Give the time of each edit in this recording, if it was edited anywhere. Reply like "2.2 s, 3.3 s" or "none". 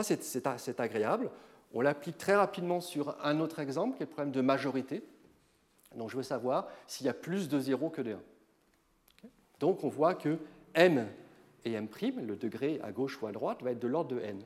9.6 s

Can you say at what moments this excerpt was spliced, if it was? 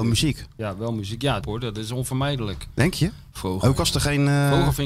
1.4 s

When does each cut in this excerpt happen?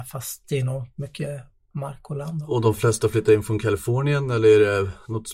none

